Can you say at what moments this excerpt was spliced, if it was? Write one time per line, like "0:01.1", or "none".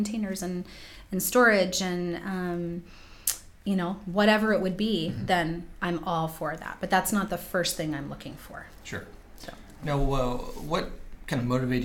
0:09.8